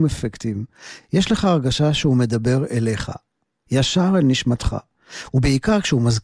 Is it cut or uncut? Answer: uncut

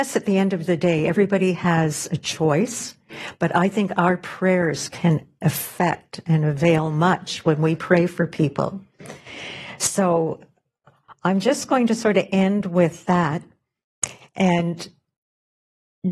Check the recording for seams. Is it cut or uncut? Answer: uncut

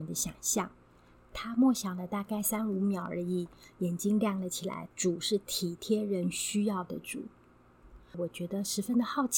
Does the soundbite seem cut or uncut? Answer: cut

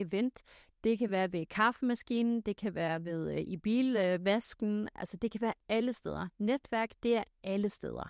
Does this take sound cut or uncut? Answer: uncut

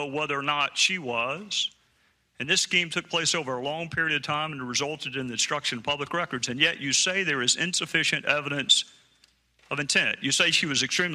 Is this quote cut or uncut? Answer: uncut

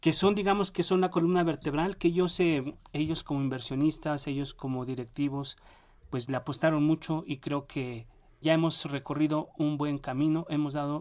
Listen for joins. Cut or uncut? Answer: cut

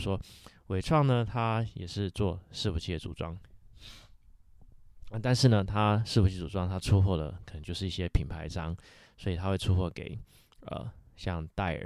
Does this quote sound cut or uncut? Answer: uncut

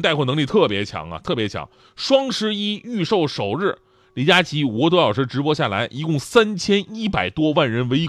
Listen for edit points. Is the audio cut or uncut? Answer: uncut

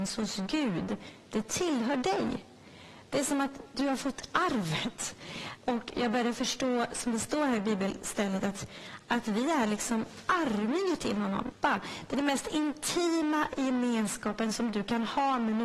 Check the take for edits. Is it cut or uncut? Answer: cut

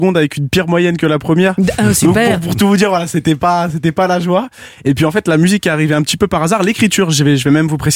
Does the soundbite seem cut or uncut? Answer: uncut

